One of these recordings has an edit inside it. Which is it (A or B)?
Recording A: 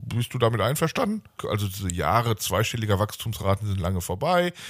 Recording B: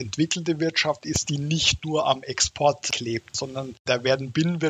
A